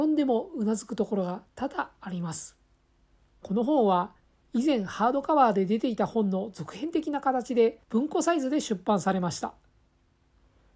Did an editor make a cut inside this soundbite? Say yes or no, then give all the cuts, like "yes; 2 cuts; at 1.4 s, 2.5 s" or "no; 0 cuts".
yes; 2 cuts; at 3.4 s, 7.8 s